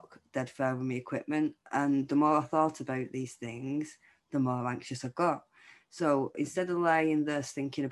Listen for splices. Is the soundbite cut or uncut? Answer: uncut